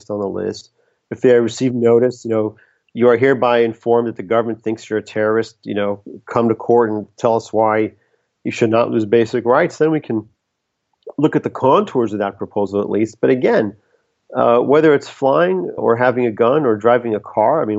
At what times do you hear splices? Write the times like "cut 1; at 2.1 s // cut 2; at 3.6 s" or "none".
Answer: cut 1; at 15.8 s